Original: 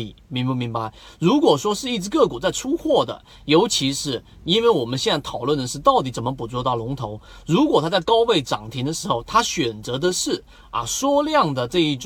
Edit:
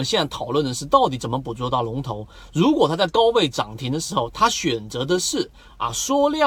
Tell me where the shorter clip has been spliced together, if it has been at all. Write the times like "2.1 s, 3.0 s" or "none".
none